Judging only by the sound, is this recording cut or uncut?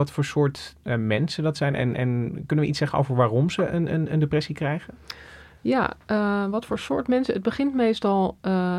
uncut